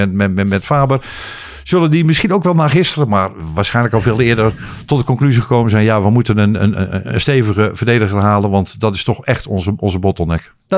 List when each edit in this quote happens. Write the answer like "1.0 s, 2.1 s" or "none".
none